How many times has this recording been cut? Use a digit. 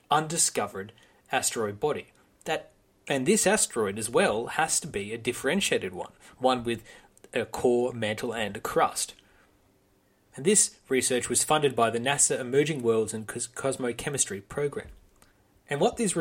1